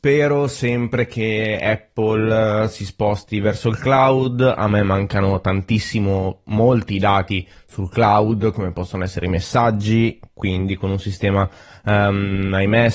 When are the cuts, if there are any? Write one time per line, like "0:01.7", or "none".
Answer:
none